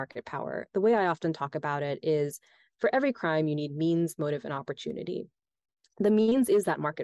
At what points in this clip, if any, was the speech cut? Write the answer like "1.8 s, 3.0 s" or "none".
none